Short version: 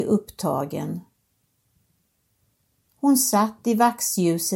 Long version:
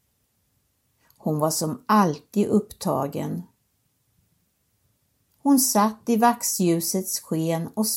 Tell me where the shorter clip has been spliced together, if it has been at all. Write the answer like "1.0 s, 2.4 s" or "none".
none